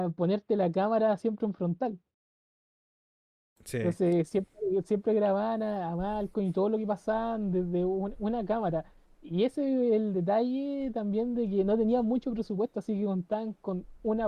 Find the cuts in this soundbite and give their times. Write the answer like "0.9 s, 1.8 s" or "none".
none

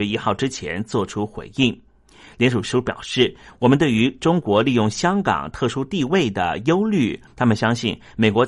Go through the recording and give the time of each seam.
7.3 s

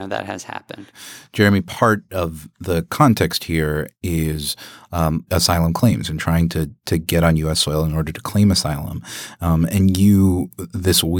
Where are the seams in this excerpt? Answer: 5.3 s

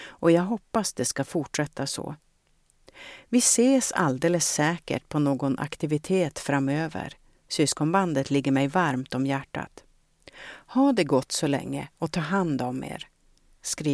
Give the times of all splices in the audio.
none

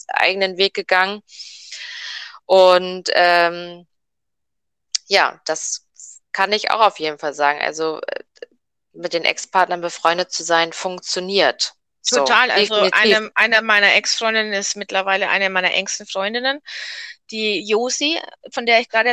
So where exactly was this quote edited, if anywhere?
none

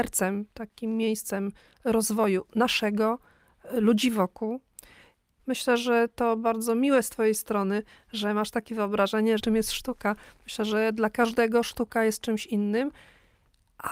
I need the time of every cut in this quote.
5.4 s, 9.4 s

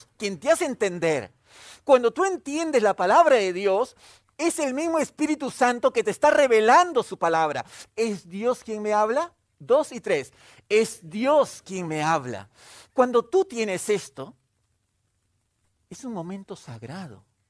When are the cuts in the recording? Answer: 7.9 s

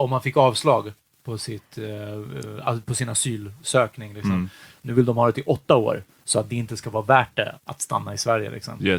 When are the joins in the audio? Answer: 4.7 s, 7.6 s

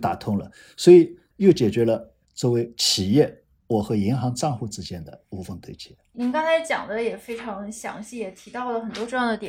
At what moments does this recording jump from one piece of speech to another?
1.3 s

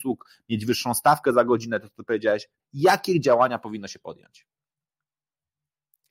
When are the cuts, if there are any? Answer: 2.6 s

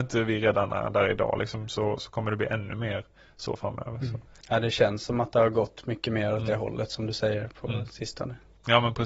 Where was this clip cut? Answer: none

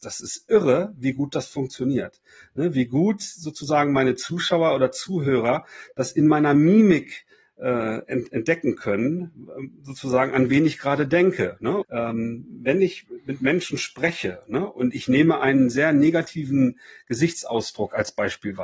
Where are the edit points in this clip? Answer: 11.8 s

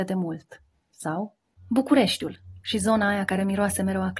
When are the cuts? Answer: 1.6 s

